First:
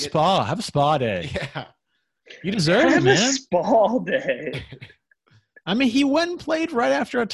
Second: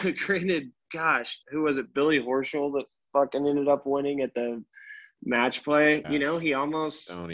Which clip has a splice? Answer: second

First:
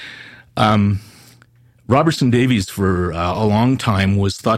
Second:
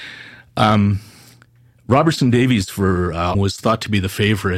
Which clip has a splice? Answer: second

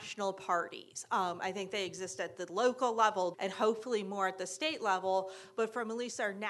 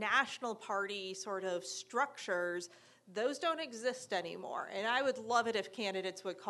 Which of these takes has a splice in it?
first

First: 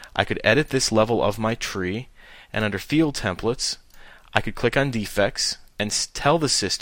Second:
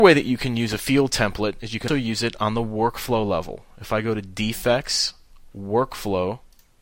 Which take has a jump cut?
second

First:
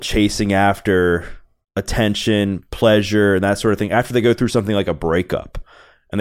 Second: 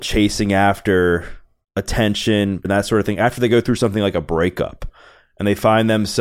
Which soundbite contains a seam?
second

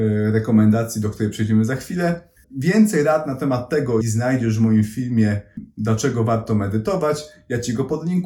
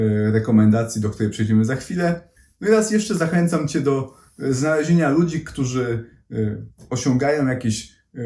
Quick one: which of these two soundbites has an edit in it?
first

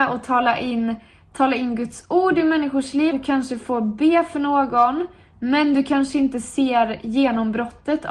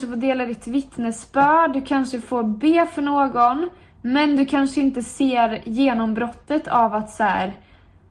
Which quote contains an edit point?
first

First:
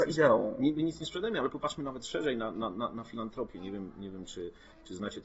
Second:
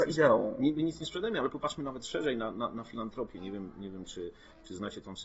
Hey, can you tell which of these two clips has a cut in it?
second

